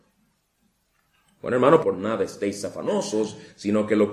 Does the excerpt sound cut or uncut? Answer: cut